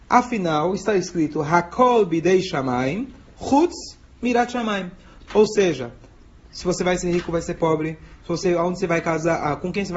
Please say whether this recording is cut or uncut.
cut